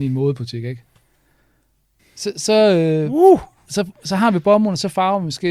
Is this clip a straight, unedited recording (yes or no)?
no